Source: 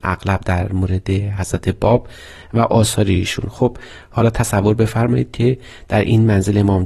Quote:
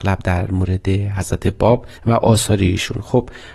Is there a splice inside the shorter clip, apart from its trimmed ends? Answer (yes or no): yes